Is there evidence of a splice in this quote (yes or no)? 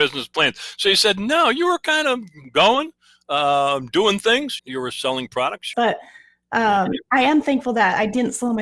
yes